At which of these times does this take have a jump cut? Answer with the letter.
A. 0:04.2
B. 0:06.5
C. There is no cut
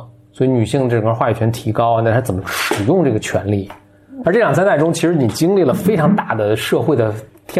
A